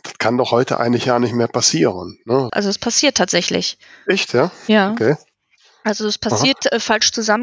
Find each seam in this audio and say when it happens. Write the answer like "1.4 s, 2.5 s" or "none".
2.5 s